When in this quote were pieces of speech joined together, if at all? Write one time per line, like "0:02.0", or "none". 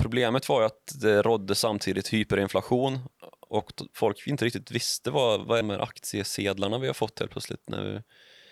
0:05.6